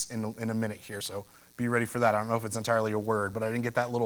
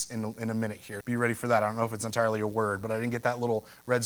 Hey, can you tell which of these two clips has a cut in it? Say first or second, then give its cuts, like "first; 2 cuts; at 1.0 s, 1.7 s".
second; 1 cut; at 1.0 s